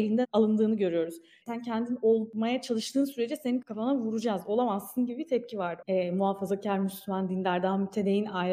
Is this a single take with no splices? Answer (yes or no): no